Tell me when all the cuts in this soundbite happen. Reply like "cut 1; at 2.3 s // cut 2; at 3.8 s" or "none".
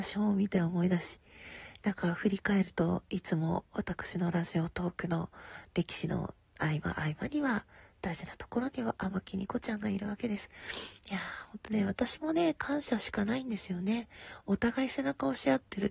cut 1; at 11.0 s